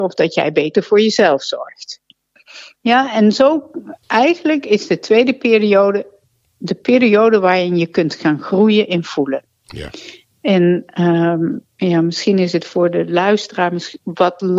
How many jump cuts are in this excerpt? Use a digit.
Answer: 2